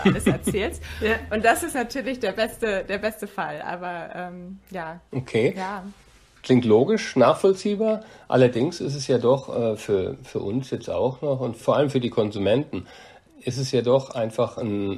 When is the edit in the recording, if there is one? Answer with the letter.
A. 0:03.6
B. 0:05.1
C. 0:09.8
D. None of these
B